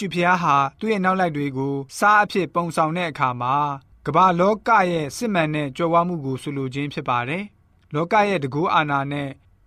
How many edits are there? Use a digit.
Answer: 1